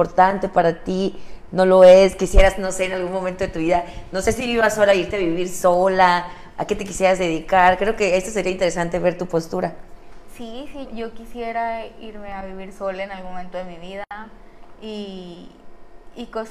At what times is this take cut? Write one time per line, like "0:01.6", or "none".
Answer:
0:10.8